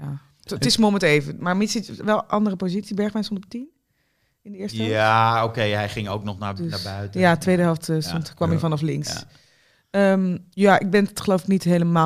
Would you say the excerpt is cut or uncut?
uncut